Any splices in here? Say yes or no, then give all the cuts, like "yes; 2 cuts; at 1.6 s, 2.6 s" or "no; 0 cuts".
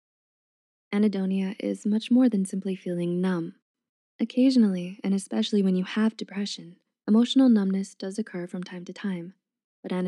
no; 0 cuts